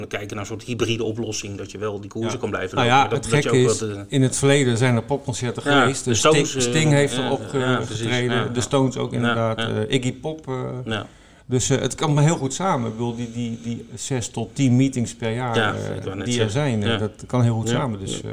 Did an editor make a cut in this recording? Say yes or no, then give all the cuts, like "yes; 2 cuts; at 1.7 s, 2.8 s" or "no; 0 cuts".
no; 0 cuts